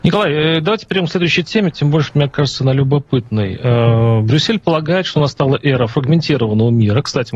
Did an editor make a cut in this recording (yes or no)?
no